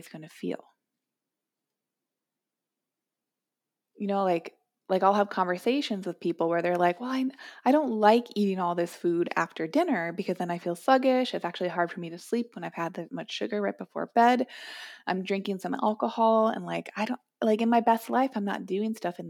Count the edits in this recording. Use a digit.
0